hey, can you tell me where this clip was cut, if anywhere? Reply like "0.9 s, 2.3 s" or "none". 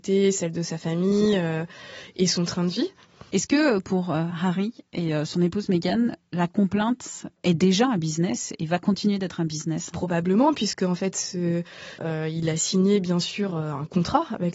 3.3 s, 12.0 s